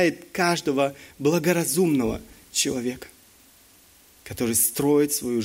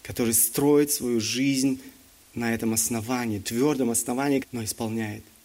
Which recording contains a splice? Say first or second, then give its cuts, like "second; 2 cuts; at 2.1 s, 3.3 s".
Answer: second; 1 cut; at 4.4 s